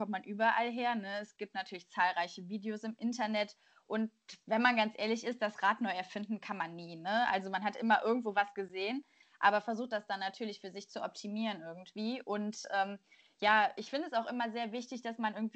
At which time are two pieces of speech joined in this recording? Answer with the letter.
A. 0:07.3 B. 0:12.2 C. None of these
C